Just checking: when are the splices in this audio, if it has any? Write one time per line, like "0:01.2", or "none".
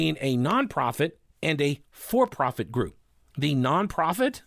0:03.2